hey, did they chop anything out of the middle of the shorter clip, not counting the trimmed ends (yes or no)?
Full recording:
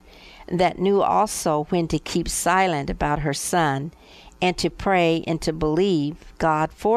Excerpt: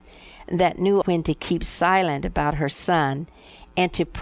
yes